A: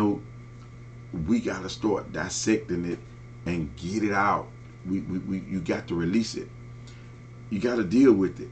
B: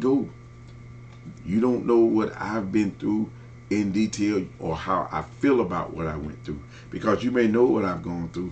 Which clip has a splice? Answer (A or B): B